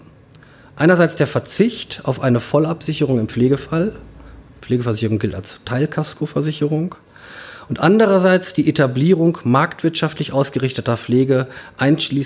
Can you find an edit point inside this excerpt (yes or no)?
no